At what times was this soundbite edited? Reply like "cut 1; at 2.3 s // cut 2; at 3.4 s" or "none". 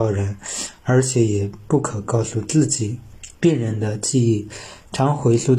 cut 1; at 3.3 s